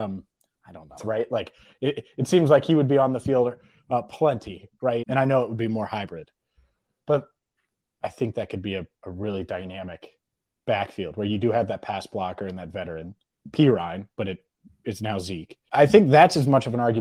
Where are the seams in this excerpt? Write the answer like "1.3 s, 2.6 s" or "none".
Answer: 1.0 s, 5.0 s, 15.7 s